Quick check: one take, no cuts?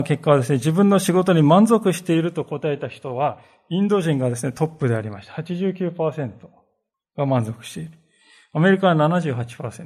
yes; 0 cuts

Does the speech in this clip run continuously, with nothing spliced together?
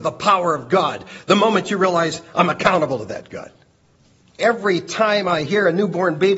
no; 1 cut; at 4.4 s

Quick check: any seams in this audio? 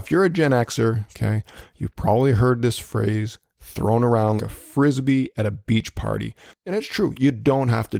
yes; 3 cuts; at 1.1 s, 4.4 s, 6.5 s

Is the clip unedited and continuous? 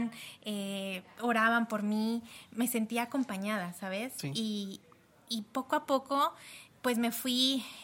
yes; 0 cuts

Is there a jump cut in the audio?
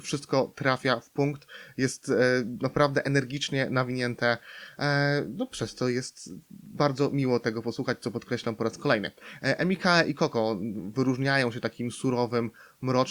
no; 0 cuts

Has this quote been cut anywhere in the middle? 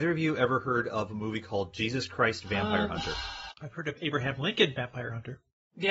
yes; 1 cut; at 3.6 s

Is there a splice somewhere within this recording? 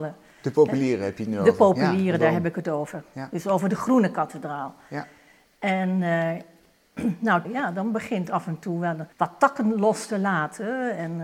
yes; 2 cuts; at 7.4 s, 9.1 s

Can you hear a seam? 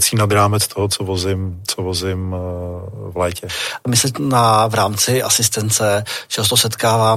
no; 0 cuts

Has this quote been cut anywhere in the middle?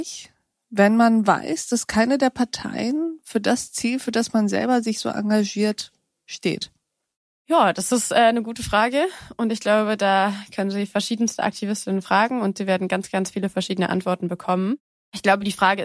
no; 0 cuts

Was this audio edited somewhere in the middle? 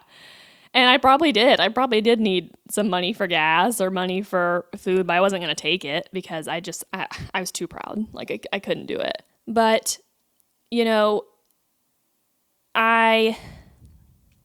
yes; 1 cut; at 9.3 s

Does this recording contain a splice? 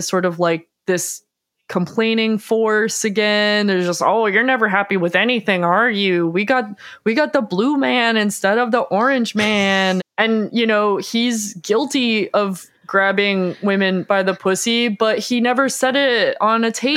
yes; 1 cut; at 10.0 s

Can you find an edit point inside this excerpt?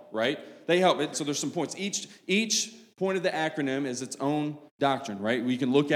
yes; 2 cuts; at 1.1 s, 4.7 s

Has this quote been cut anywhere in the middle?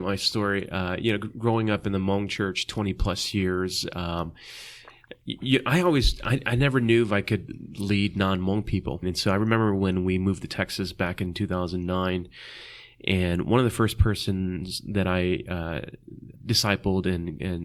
yes; 2 cuts; at 9.0 s, 16.3 s

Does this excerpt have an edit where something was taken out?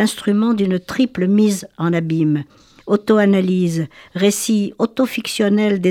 no; 0 cuts

